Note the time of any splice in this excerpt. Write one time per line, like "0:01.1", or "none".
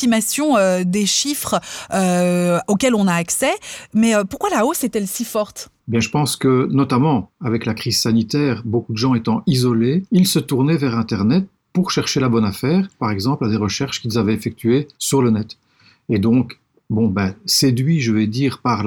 0:10.1
0:13.0
0:14.9